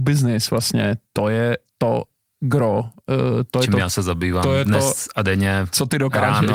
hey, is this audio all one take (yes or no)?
no